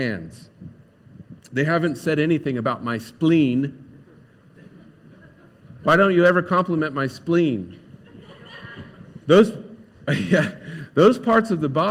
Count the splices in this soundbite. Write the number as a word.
one